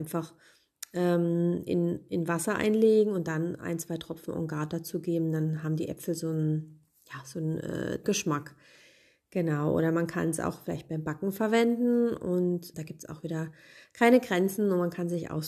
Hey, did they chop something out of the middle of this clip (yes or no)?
yes